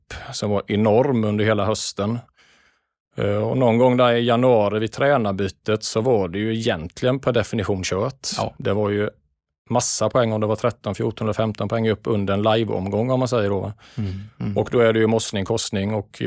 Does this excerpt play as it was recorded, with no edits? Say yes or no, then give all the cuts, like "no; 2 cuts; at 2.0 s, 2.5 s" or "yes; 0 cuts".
yes; 0 cuts